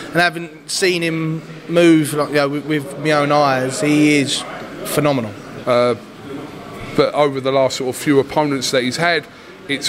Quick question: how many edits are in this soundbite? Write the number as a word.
one